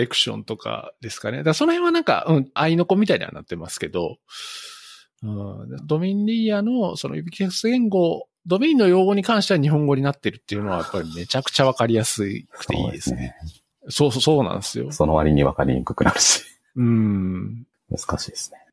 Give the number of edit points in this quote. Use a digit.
3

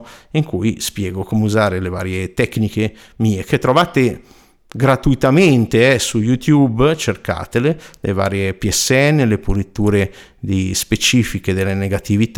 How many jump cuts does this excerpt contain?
0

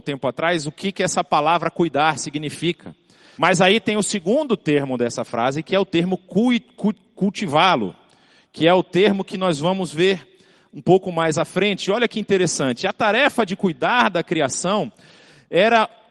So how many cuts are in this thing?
1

